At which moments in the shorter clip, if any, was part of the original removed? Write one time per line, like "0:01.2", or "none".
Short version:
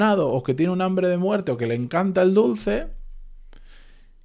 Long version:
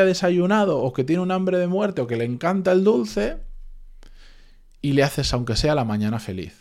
none